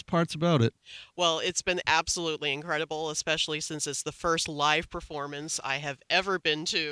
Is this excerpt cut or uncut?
uncut